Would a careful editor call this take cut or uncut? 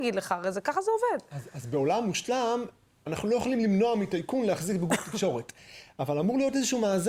cut